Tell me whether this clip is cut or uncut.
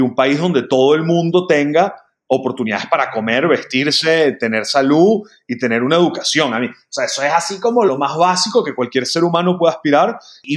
uncut